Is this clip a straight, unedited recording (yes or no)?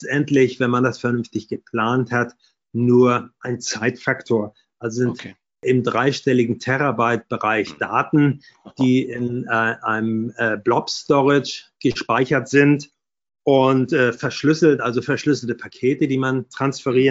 yes